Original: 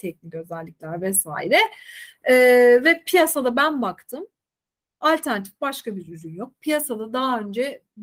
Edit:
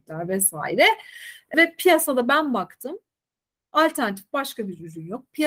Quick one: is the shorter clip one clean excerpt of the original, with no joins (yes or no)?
no